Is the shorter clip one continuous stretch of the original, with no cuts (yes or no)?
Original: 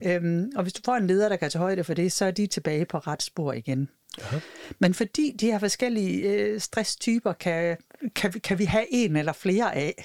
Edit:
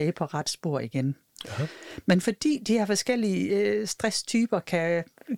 yes